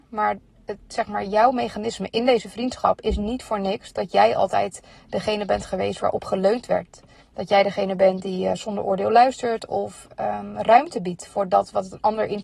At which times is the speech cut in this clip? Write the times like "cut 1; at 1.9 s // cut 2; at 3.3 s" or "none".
cut 1; at 7.2 s